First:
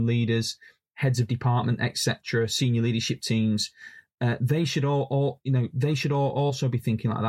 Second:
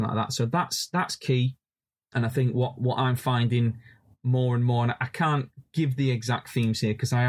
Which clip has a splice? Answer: second; 1 cut; at 2.1 s

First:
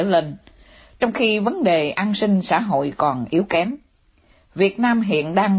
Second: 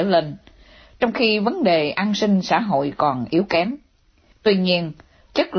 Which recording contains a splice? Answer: second; 1 cut; at 4.3 s

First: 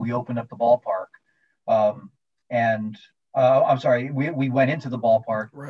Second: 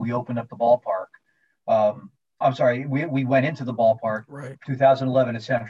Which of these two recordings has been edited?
second; 2 cuts; at 2.4 s, 4.5 s

